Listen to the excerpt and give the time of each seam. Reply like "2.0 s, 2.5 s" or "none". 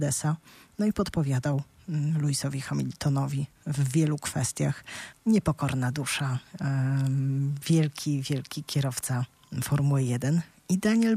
5.1 s